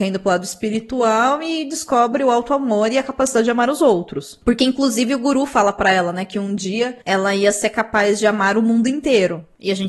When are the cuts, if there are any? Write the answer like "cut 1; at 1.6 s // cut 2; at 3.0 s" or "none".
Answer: none